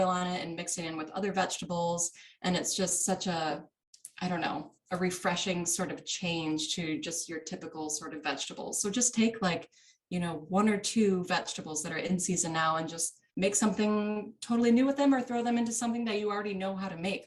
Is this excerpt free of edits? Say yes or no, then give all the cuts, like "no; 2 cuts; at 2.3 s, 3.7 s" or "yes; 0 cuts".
no; 1 cut; at 13.3 s